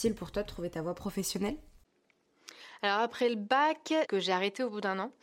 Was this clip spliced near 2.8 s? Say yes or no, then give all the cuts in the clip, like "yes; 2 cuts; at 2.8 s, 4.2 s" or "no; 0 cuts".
no; 1 cut; at 4.1 s